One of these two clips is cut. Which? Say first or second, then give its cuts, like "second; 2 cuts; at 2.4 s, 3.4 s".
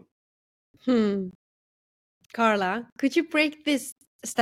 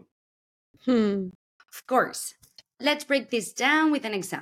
second; 1 cut; at 1.6 s